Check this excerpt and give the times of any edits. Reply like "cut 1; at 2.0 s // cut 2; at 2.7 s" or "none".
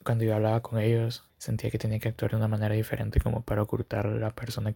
cut 1; at 1.3 s